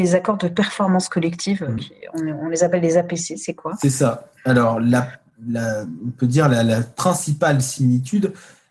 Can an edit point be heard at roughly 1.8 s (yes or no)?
no